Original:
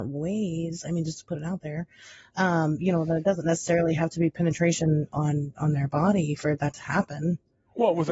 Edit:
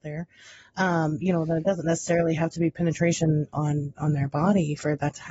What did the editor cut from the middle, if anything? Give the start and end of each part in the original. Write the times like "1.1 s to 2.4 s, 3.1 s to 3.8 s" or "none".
none